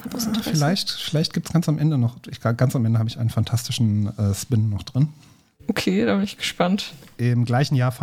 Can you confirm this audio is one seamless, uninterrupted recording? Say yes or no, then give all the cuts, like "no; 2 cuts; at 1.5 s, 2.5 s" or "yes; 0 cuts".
yes; 0 cuts